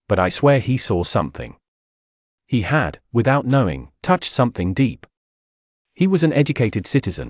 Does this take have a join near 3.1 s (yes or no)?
no